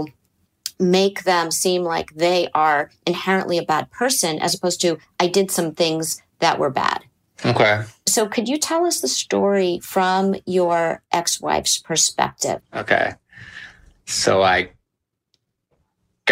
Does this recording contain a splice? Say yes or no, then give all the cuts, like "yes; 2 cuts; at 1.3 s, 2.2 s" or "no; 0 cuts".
yes; 1 cut; at 12.6 s